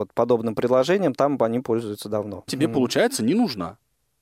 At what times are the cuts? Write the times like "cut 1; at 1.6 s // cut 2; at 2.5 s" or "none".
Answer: cut 1; at 2.5 s